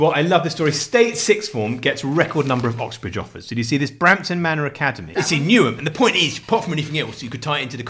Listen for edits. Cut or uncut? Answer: cut